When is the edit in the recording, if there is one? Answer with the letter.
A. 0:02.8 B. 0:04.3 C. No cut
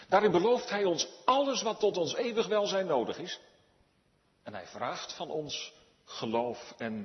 C